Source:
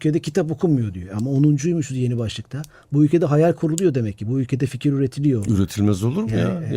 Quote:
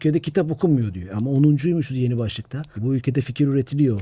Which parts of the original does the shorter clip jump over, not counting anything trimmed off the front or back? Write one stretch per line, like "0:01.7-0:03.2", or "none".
0:02.8-0:04.2